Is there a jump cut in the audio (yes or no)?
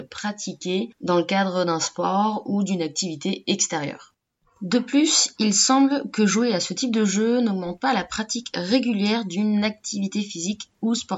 no